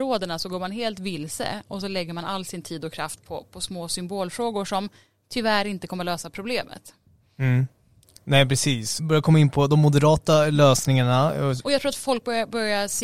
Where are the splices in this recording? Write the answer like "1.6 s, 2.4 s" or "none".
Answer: 9.0 s, 11.6 s